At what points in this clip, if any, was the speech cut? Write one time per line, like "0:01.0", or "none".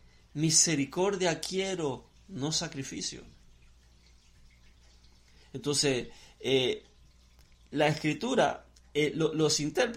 none